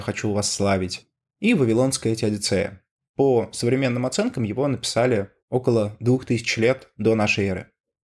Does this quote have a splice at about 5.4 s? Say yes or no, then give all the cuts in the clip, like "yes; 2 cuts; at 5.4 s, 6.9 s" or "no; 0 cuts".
yes; 2 cuts; at 3.0 s, 5.4 s